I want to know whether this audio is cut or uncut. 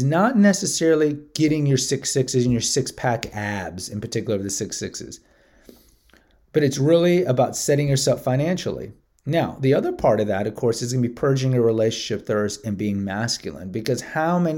uncut